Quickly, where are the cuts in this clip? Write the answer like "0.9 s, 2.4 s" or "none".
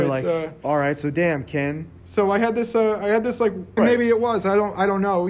2.0 s, 3.8 s